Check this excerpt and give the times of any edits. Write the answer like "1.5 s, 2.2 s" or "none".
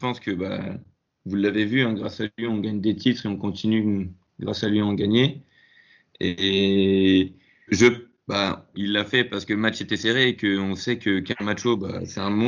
7.7 s, 8.7 s

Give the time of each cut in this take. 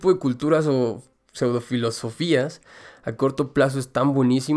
none

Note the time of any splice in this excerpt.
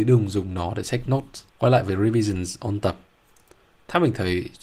1.5 s

